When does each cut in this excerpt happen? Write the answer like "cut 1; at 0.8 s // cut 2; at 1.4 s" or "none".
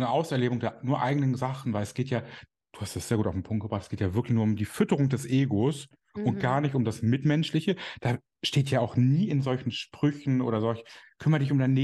none